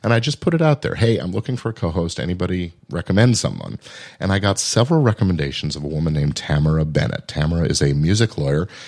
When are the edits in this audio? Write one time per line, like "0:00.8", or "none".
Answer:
0:02.8